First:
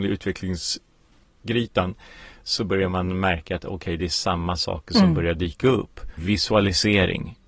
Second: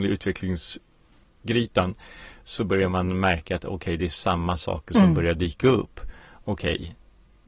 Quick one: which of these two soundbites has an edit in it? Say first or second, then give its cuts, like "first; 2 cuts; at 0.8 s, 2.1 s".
first; 1 cut; at 6.2 s